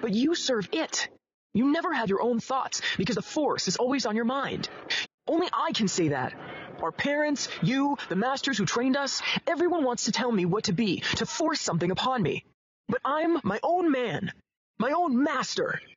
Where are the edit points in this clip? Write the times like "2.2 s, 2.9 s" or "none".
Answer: 5.0 s